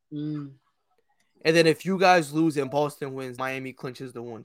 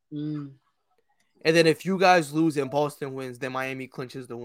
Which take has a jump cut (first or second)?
first